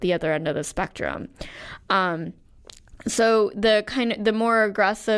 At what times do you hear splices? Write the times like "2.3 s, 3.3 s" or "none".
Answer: none